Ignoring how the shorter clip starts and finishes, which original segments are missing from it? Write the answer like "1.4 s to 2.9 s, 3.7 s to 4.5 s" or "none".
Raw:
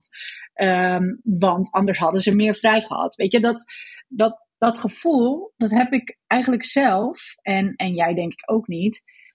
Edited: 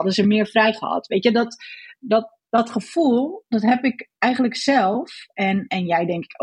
none